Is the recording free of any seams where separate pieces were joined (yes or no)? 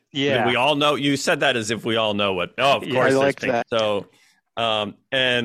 no